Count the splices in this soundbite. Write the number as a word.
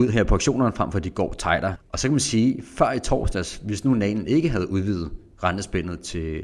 one